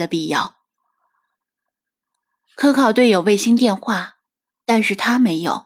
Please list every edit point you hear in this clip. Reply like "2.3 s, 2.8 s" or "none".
none

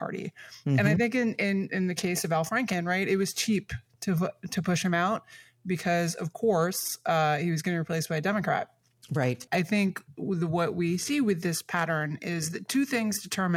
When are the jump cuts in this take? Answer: 9.5 s

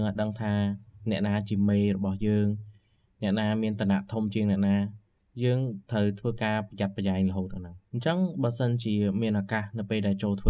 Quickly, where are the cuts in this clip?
7.8 s

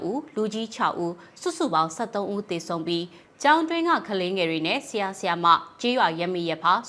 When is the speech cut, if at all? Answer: none

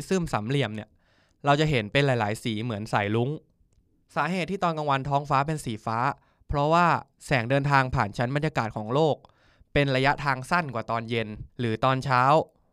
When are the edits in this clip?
11.5 s

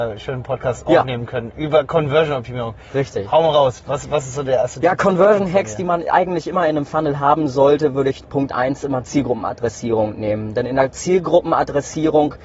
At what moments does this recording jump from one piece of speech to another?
none

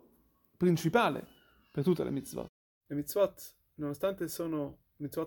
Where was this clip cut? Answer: 2.9 s

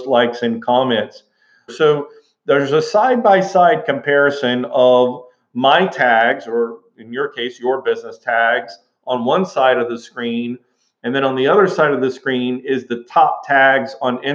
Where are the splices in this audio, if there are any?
1.7 s

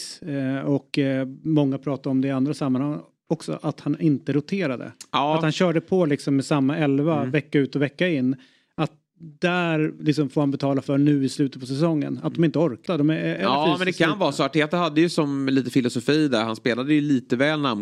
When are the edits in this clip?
12.9 s

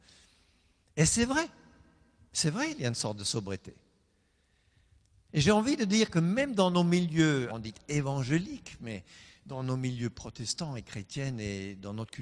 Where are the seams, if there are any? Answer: 5.3 s, 7.5 s

